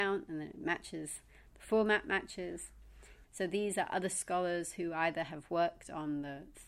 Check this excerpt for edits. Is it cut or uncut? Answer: cut